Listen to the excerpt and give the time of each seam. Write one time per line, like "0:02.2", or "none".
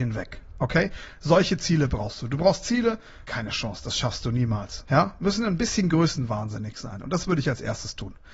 0:03.3
0:04.8